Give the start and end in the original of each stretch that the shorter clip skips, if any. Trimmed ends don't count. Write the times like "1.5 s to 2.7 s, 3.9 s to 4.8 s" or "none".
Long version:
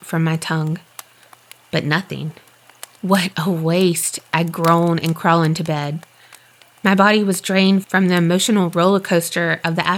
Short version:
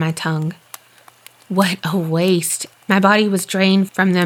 1.6 s to 2.9 s, 4.3 s to 6.7 s